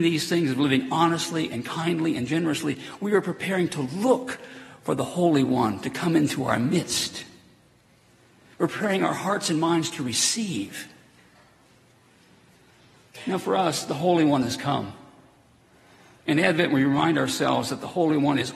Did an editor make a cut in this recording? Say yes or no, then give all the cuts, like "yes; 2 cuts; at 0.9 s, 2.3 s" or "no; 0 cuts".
no; 0 cuts